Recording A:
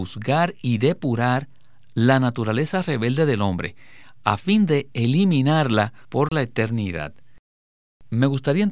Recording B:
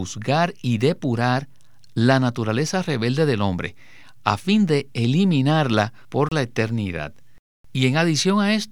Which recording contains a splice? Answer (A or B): B